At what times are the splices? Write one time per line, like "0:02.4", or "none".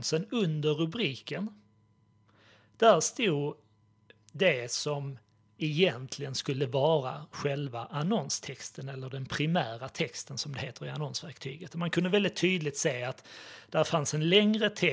none